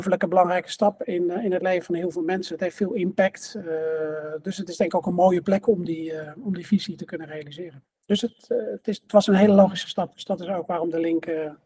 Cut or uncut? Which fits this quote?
uncut